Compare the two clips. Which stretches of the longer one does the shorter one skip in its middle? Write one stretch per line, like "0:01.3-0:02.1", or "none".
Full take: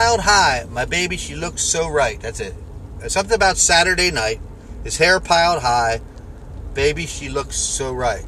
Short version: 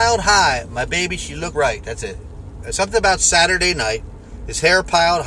0:01.5-0:01.9